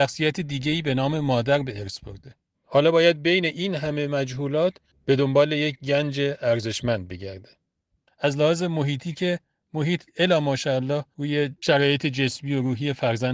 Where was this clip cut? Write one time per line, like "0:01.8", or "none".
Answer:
0:02.5
0:08.1